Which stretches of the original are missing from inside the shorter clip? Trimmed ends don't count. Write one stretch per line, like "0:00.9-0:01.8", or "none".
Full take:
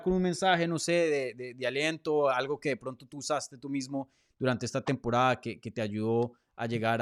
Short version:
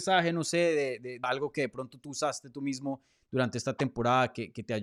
0:01.6-0:02.3